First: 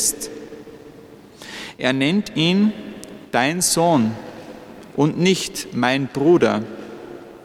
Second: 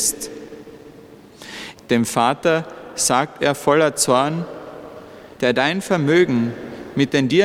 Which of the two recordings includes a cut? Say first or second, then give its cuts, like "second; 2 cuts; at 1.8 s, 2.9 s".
second; 2 cuts; at 1.8 s, 5.4 s